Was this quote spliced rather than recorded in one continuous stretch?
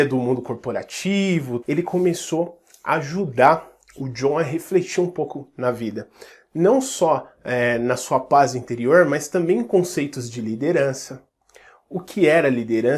yes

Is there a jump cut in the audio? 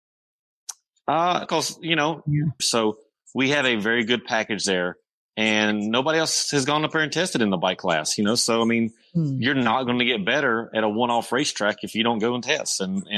yes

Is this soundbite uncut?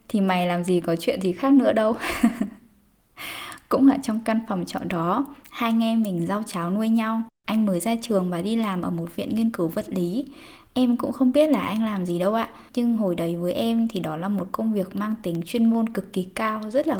no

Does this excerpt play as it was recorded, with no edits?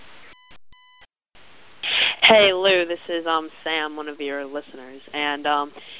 yes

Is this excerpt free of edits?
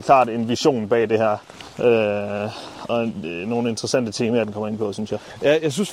no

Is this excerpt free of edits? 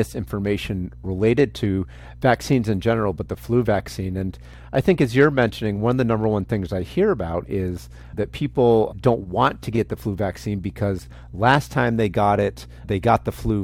yes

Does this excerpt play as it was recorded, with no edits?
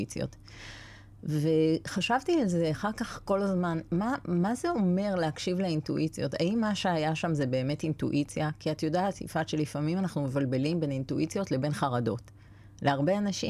yes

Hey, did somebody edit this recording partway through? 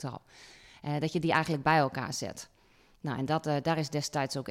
no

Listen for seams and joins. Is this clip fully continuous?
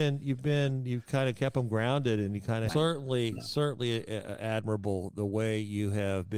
no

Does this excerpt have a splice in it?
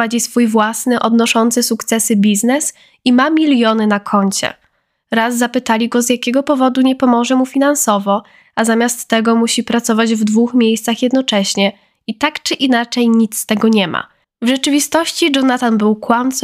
yes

